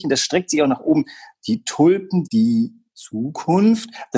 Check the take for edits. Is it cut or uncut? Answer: cut